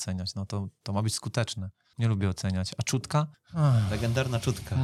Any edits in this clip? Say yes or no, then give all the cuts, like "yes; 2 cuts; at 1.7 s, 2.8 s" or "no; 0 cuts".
no; 0 cuts